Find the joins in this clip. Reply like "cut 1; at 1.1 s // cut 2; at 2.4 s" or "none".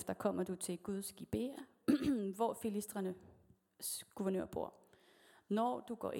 none